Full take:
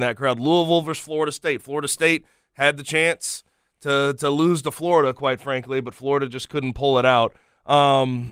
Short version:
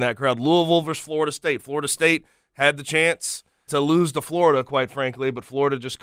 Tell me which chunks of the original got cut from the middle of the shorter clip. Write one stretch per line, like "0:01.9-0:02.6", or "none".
0:03.7-0:04.2